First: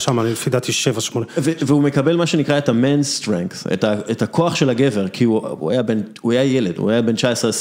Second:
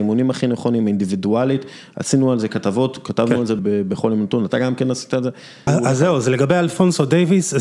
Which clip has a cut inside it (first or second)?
second